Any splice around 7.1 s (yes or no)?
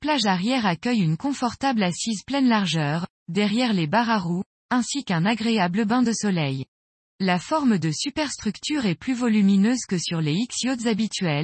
yes